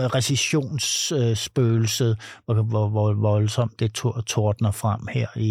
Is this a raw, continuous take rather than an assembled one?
yes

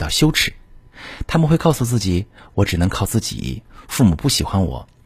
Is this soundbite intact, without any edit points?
yes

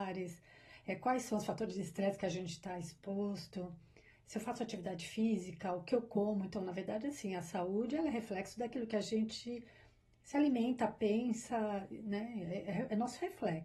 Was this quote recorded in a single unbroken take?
yes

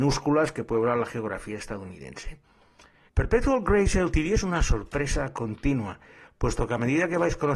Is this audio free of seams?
no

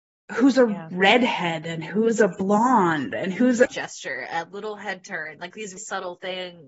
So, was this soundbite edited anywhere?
yes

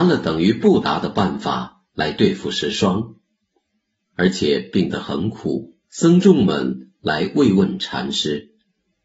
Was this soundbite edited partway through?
yes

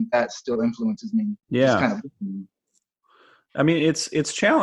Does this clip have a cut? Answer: yes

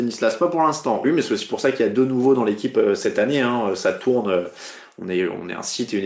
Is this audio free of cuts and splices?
no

